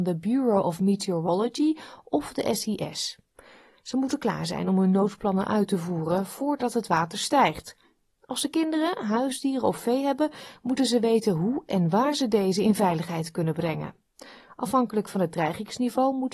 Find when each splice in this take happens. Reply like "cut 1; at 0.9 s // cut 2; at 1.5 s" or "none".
none